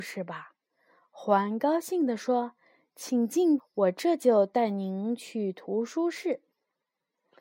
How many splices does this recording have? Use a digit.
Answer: 1